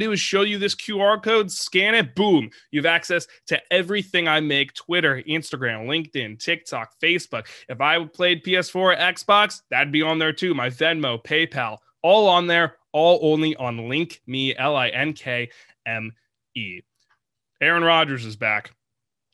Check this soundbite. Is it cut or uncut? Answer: cut